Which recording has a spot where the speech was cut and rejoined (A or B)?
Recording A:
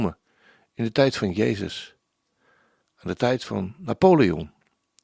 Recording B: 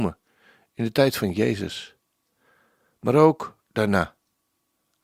A